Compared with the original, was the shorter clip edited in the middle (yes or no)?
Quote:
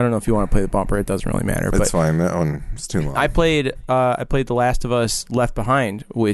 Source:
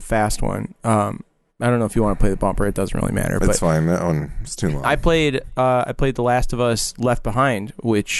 no